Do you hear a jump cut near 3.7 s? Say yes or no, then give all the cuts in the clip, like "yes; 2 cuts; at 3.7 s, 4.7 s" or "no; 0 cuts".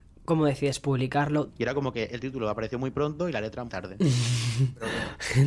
yes; 2 cuts; at 1.5 s, 3.7 s